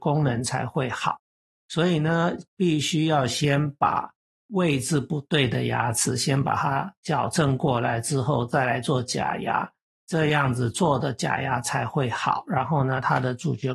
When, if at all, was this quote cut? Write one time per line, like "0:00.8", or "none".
none